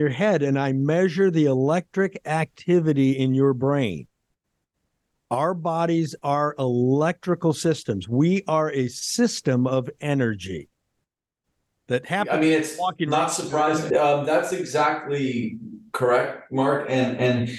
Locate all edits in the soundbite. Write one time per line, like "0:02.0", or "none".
0:13.9